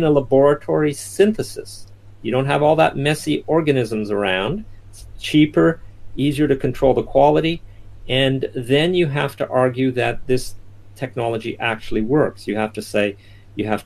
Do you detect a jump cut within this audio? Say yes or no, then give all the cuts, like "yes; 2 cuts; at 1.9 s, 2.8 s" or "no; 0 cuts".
no; 0 cuts